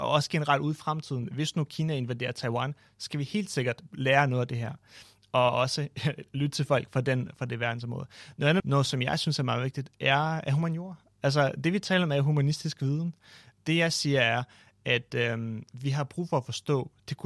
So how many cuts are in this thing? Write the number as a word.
one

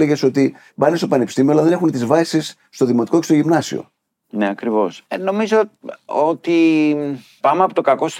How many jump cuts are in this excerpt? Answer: zero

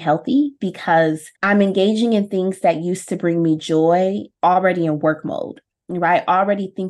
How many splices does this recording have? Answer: one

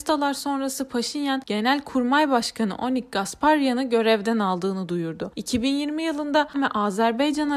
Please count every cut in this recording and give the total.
one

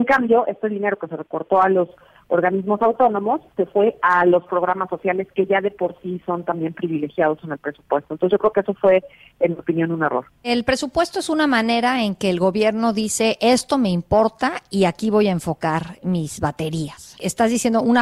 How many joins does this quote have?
zero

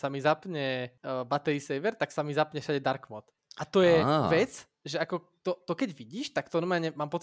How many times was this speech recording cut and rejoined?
zero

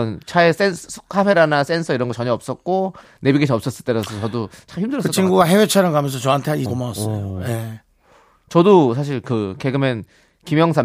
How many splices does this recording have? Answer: one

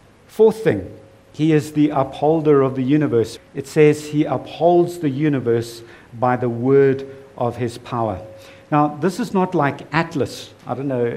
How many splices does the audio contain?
one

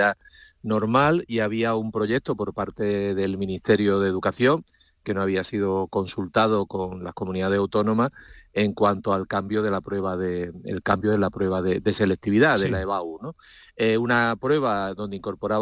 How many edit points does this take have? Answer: zero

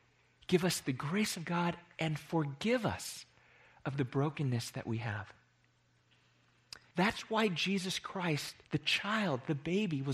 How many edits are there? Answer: two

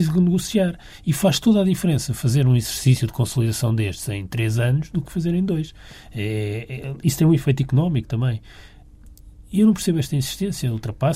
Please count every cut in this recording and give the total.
zero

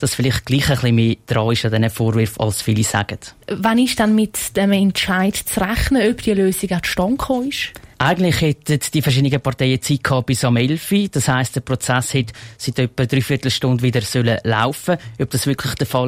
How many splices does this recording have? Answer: one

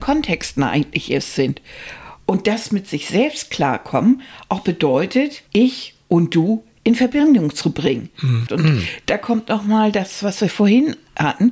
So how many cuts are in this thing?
two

